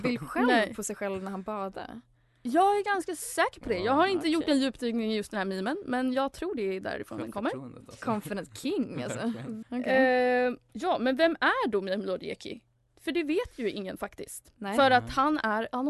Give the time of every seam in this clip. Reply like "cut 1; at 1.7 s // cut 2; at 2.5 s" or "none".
cut 1; at 9.6 s